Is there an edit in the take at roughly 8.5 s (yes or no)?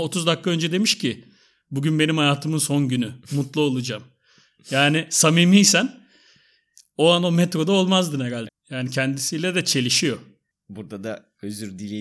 yes